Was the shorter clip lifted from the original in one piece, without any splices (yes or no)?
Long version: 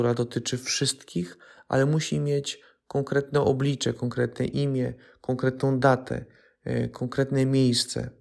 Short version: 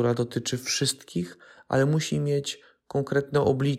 yes